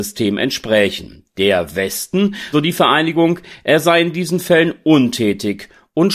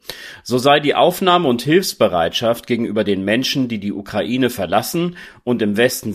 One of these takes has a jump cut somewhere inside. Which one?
first; 1 cut; at 2.5 s

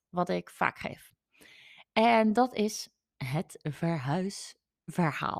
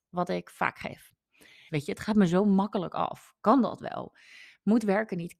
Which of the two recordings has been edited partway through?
second; 1 cut; at 1.7 s

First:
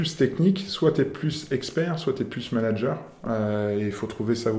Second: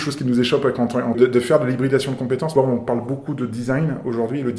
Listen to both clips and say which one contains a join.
second; 2 cuts; at 1.1 s, 2.6 s

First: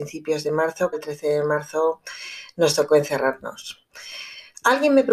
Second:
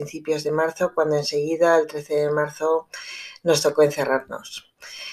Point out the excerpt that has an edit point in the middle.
first; 1 cut; at 0.9 s

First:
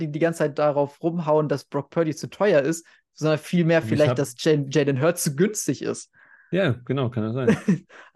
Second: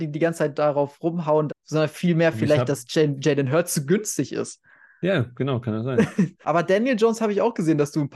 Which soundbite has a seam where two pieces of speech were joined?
second; 2 cuts; at 1.5 s, 6.4 s

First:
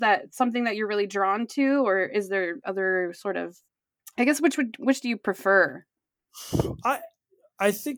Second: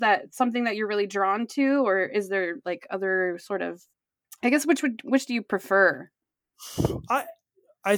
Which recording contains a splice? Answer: first; 1 cut; at 2.6 s

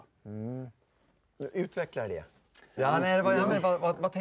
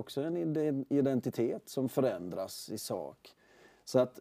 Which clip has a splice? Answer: first; 1 cut; at 2.8 s

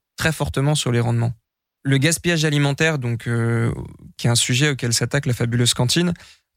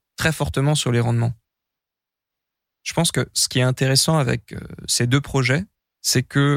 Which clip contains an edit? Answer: first; 1 cut; at 1.7 s

